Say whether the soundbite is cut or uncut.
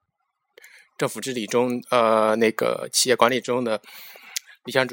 uncut